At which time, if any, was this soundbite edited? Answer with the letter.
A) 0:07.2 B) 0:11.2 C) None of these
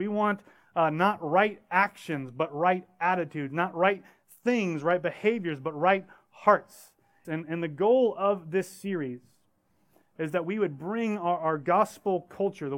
A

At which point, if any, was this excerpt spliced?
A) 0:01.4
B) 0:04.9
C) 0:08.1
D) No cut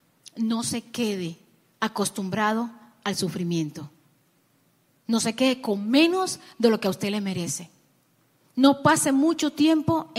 D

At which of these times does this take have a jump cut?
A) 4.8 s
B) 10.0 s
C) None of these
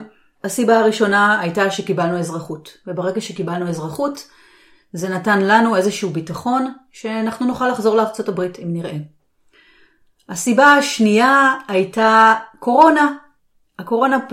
C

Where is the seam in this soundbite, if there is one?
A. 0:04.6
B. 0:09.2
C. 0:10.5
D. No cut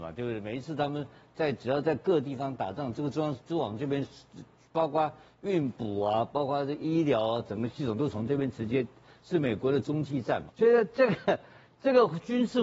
C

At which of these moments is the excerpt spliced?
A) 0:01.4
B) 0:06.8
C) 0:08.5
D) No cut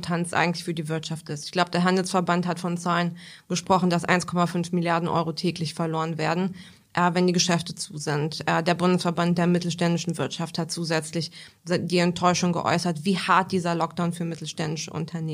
D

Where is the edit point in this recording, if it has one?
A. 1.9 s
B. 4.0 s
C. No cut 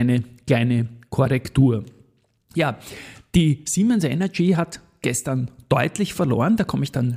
C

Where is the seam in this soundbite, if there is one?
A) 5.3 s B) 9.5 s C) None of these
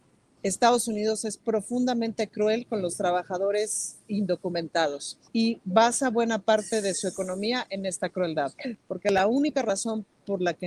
A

